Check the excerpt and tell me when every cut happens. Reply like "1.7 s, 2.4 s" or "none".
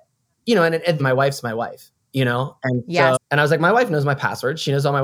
1.0 s, 3.2 s